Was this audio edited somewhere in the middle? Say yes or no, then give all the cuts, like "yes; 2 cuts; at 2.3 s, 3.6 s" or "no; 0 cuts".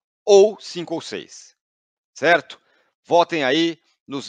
no; 0 cuts